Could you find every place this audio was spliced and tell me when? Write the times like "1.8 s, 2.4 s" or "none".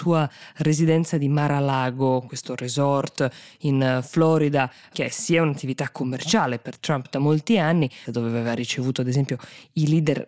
8.0 s